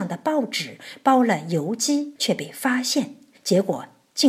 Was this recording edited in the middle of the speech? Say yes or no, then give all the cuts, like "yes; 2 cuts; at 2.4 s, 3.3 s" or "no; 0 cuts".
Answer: yes; 1 cut; at 2.2 s